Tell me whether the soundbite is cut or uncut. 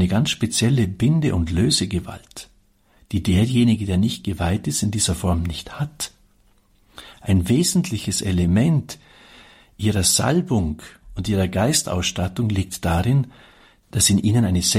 uncut